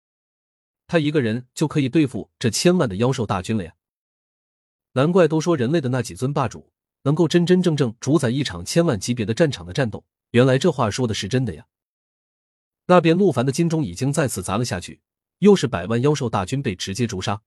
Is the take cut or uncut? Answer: cut